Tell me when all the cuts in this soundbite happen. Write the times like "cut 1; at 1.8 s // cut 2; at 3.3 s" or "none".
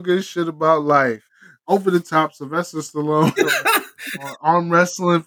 cut 1; at 1.3 s // cut 2; at 3.4 s